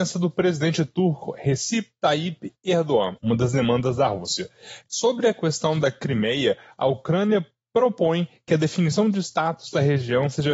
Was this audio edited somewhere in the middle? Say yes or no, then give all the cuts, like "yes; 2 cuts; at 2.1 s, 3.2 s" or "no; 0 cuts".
yes; 2 cuts; at 3.2 s, 4.9 s